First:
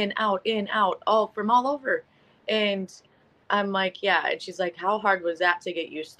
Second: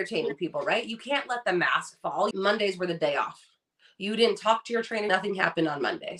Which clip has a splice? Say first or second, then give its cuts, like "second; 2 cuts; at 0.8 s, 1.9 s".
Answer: second; 2 cuts; at 2.3 s, 5.1 s